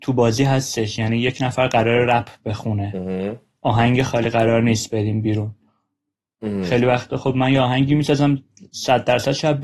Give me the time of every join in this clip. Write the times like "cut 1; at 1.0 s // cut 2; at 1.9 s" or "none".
none